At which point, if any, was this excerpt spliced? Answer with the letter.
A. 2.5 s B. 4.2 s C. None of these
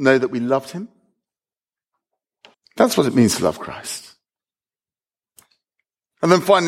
A